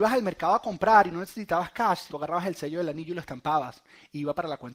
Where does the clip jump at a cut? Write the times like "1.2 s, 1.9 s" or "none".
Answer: 2.1 s